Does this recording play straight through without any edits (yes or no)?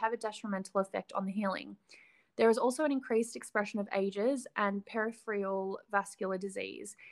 yes